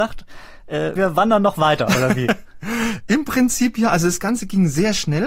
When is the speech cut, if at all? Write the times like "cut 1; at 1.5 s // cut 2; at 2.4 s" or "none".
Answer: cut 1; at 1.0 s